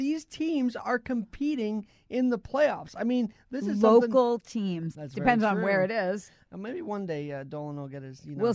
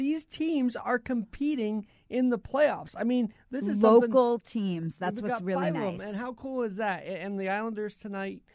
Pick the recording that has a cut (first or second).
first